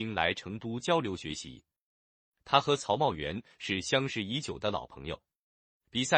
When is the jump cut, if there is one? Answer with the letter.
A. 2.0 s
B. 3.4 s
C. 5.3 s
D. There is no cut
D